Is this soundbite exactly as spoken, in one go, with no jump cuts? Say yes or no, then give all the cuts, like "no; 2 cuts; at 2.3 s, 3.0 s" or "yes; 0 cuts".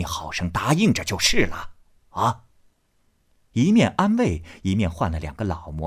yes; 0 cuts